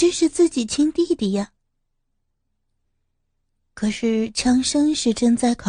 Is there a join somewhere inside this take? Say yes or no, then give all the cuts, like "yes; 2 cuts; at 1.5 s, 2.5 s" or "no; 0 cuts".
no; 0 cuts